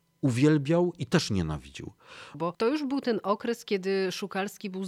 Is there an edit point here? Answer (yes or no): yes